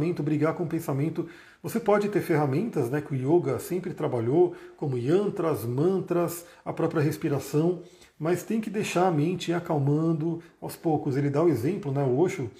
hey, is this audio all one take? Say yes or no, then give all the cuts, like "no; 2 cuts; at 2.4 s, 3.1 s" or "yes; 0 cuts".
yes; 0 cuts